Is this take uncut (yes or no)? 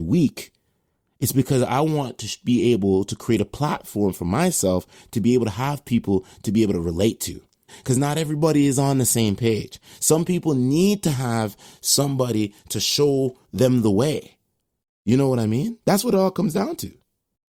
no